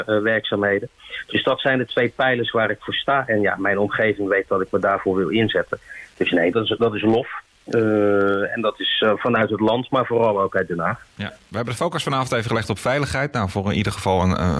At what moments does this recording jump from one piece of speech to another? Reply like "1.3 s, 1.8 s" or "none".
6.5 s